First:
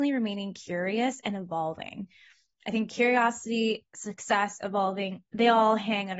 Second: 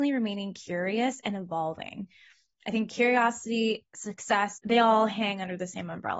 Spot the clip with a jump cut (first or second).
second